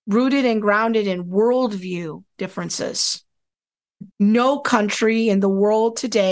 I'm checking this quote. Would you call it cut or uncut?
cut